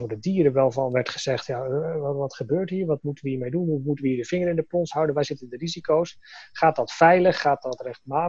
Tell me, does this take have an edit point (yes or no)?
no